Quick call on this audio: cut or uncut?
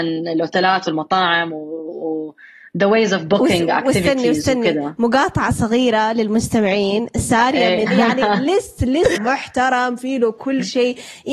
cut